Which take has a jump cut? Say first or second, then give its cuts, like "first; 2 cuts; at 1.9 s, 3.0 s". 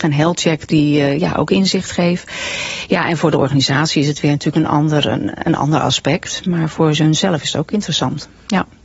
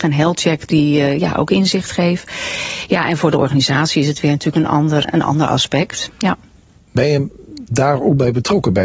second; 2 cuts; at 5.0 s, 6.1 s